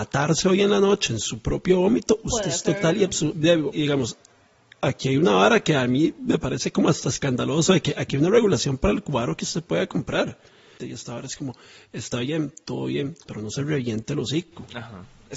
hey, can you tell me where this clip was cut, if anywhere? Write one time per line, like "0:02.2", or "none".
0:03.7
0:10.8
0:13.2